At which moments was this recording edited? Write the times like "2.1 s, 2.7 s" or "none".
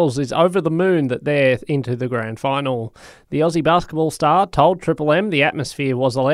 none